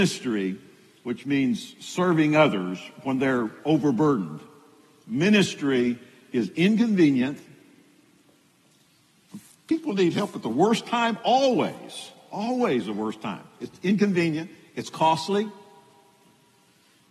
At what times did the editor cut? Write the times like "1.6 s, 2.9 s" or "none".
none